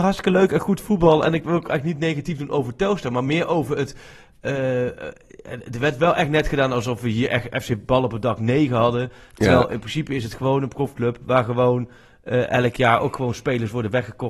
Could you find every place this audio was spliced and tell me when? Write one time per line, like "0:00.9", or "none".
none